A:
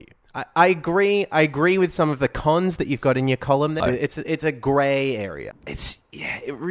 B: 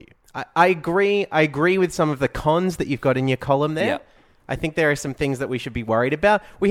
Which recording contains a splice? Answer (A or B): A